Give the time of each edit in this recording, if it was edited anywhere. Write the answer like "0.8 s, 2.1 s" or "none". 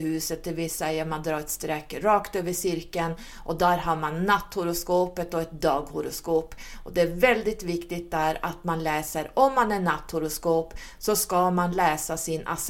none